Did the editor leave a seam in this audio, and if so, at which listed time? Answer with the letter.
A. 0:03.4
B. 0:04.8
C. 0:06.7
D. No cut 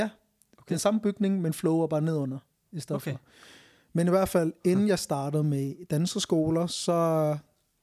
D